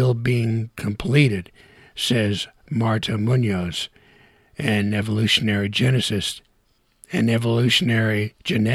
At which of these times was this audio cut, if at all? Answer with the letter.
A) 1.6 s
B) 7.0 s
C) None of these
C